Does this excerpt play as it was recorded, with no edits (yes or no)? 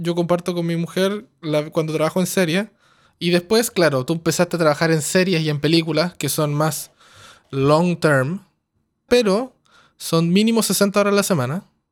no